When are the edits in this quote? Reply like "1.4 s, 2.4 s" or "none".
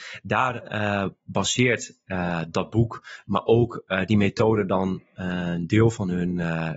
none